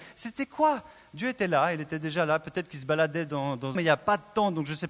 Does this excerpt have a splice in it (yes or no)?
yes